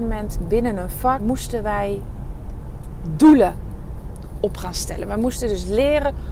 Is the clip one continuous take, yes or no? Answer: no